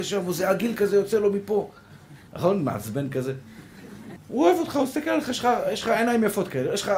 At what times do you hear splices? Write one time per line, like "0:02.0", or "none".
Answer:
0:02.3
0:04.2

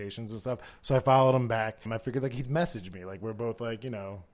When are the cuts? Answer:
0:01.9

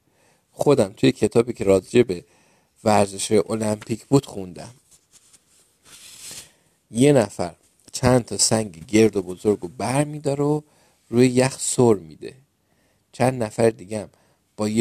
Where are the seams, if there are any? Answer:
none

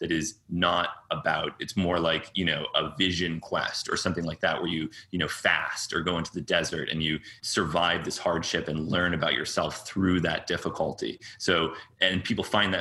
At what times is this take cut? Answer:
0:07.4

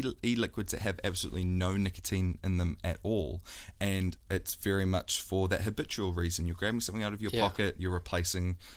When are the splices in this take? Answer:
0:04.2

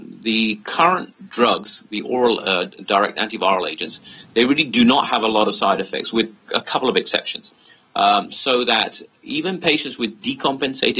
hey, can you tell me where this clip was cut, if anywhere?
none

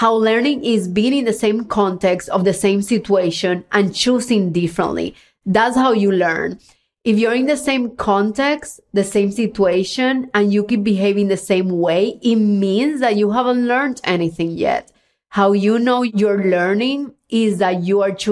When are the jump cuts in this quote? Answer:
none

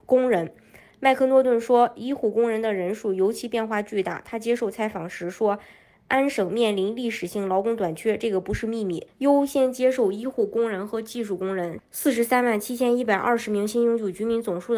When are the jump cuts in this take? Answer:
0:09.1
0:11.8

